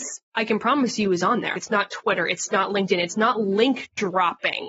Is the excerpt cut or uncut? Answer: cut